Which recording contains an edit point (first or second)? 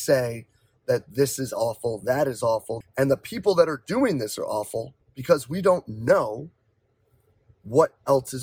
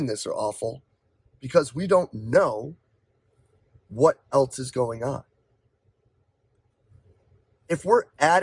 first